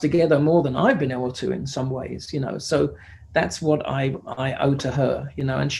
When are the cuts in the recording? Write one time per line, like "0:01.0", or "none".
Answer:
none